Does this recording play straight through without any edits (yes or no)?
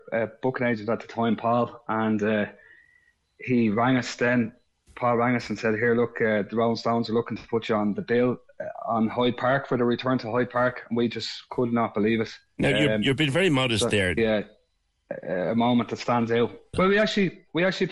no